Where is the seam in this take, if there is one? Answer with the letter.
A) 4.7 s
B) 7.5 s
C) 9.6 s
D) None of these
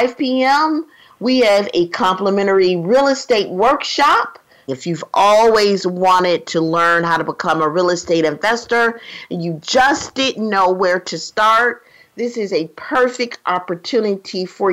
A